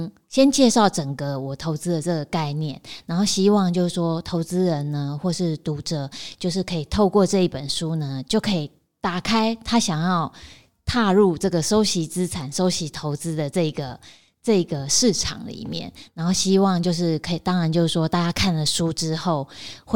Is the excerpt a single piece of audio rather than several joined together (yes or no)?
yes